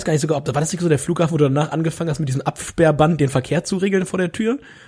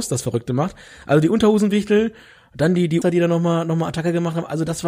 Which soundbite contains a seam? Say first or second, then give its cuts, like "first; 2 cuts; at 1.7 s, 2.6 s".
second; 1 cut; at 3.0 s